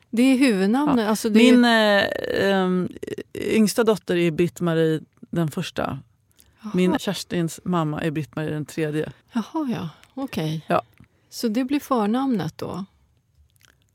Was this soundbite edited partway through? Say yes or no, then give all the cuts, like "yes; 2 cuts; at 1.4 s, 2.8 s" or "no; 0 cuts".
yes; 2 cuts; at 7.0 s, 9.2 s